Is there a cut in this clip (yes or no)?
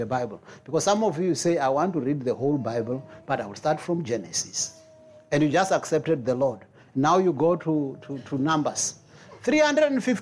no